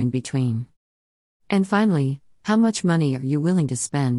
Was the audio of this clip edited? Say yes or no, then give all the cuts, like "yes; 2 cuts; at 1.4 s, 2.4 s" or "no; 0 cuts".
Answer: no; 0 cuts